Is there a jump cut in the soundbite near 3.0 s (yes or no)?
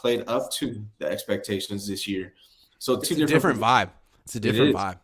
yes